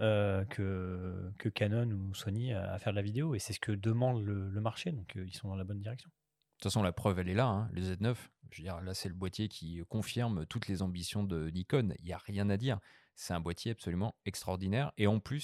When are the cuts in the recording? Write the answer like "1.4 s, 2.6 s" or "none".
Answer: none